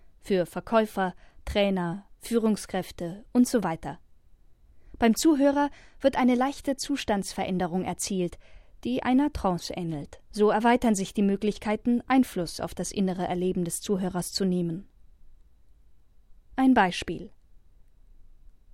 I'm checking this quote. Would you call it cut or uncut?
cut